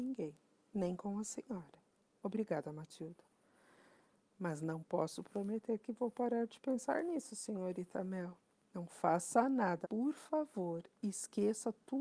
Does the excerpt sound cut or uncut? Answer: cut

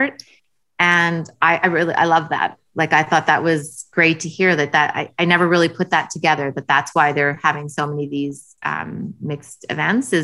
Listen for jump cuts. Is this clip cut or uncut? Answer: uncut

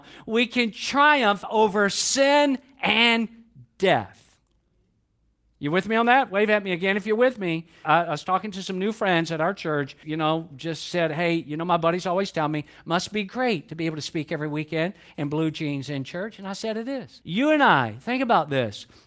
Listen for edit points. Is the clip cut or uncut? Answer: cut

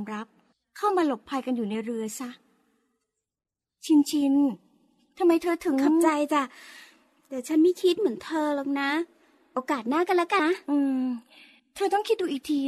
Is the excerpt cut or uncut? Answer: cut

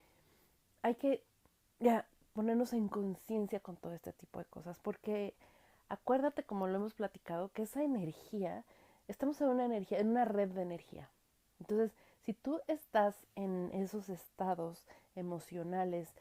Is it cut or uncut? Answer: uncut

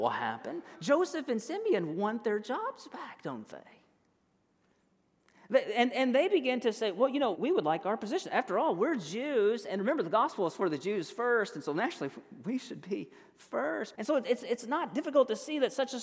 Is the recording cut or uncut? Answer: cut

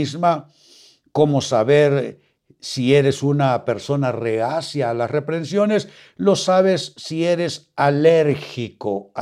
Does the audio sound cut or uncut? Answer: uncut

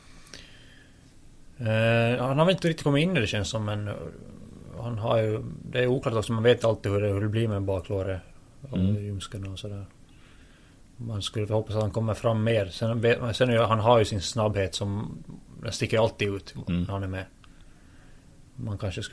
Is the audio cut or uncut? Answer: uncut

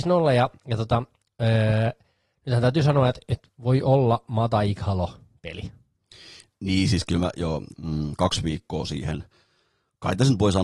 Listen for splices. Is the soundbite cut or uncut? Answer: cut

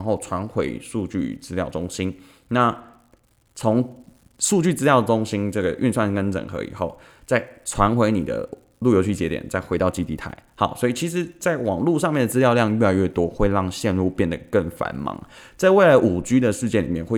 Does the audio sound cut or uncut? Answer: uncut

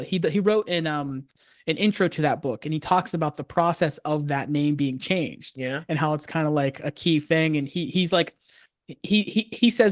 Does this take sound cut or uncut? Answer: uncut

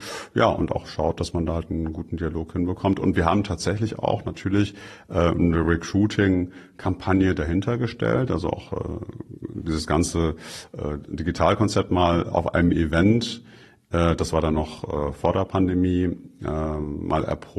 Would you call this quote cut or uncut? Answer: uncut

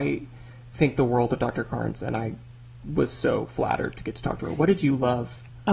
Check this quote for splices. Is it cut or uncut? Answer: uncut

